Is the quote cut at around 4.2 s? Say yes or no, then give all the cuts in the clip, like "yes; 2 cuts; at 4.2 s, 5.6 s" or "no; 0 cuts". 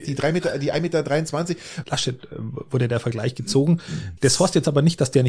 yes; 2 cuts; at 1.8 s, 4.2 s